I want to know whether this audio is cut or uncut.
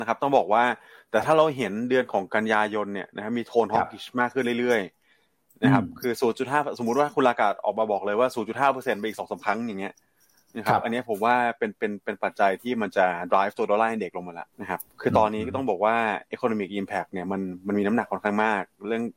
cut